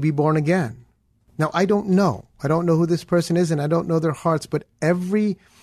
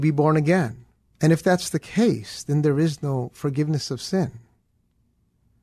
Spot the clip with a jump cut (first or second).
second